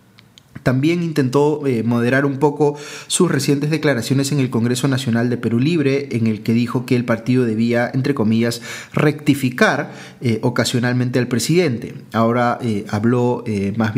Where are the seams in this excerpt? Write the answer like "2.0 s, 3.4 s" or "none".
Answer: 6.1 s